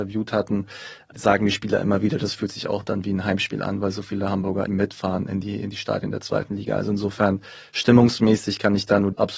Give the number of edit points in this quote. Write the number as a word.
one